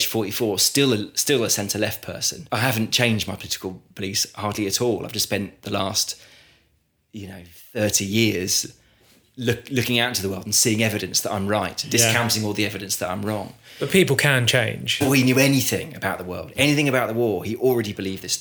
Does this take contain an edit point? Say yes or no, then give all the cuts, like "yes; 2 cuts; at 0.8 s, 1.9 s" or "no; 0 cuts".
yes; 1 cut; at 15.0 s